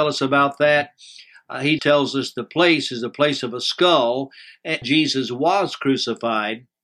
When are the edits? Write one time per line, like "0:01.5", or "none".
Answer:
0:01.8
0:04.8